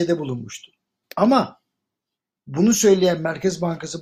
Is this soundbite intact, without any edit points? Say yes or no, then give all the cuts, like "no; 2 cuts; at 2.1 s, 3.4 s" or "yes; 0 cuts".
no; 1 cut; at 1.0 s